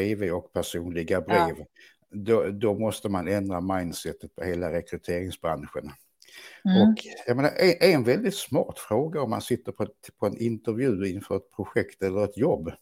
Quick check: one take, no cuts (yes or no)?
yes